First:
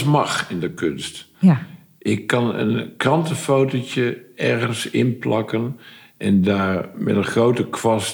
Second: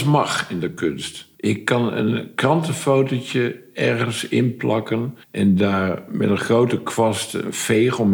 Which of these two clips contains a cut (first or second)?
second